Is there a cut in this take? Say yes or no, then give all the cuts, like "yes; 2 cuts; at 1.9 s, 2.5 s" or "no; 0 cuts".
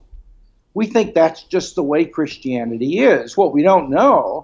no; 0 cuts